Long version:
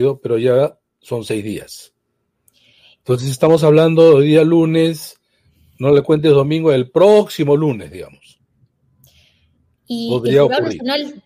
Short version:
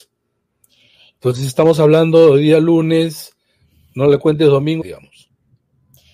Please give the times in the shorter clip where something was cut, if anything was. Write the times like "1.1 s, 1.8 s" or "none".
4.8 s

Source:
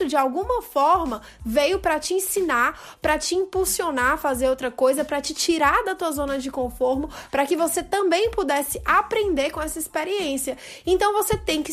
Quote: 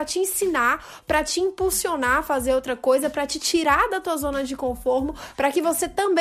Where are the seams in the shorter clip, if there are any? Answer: none

